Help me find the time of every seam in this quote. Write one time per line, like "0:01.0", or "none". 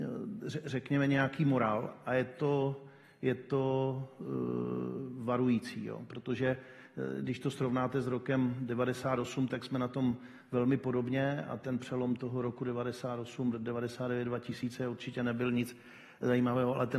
none

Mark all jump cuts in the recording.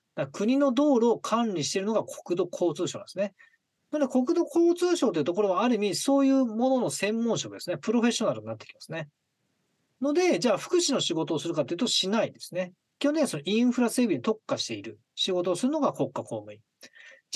none

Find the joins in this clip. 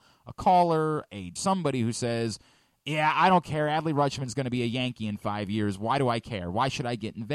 0:01.4

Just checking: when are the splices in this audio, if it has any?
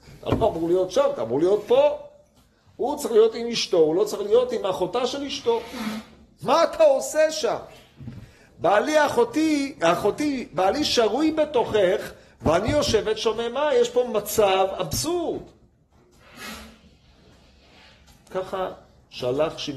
none

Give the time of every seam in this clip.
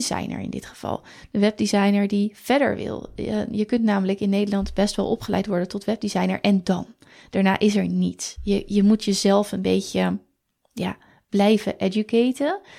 none

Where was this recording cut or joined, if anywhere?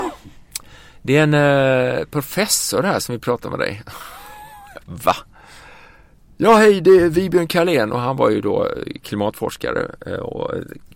0:04.8

